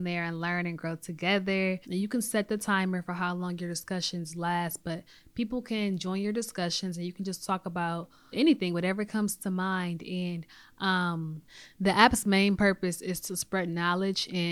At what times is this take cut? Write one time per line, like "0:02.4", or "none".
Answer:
0:01.8
0:08.3